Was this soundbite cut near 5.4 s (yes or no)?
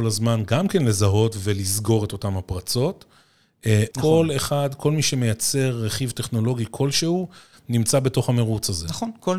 no